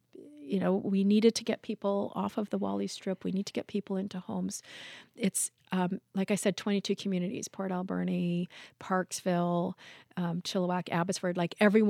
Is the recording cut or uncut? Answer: uncut